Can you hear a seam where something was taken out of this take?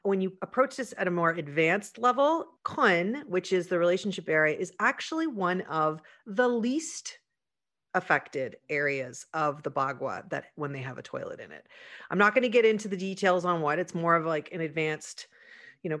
no; 0 cuts

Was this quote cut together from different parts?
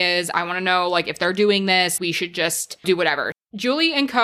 yes; 2 cuts; at 2.0 s, 3.3 s

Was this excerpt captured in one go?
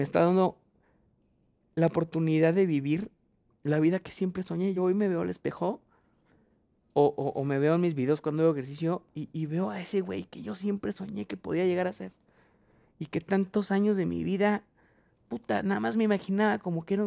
yes; 0 cuts

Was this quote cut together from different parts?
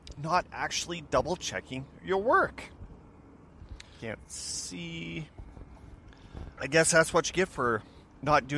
yes; 2 cuts; at 4.0 s, 6.5 s

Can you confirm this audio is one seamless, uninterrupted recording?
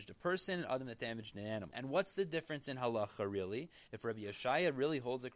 no; 2 cuts; at 1.7 s, 3.9 s

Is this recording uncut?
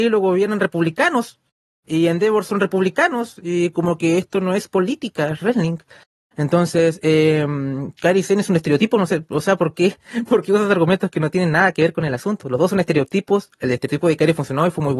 yes; 0 cuts

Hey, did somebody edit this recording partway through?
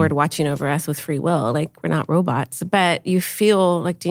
no; 0 cuts

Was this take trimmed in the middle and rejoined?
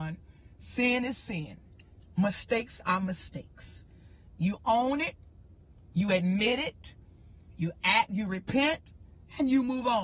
no; 0 cuts

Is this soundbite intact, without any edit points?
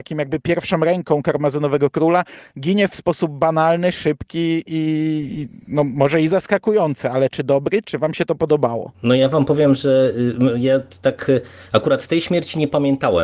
no; 1 cut; at 8.9 s

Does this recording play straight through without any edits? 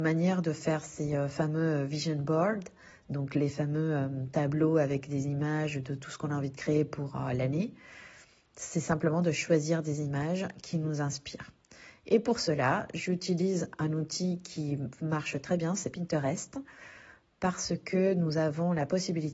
yes; 0 cuts

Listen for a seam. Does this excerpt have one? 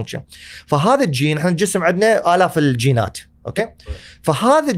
no; 0 cuts

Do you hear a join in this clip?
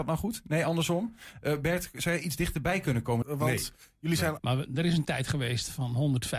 yes; 2 cuts; at 3.2 s, 4.4 s

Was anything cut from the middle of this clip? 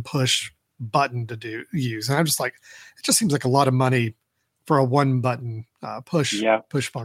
no; 0 cuts

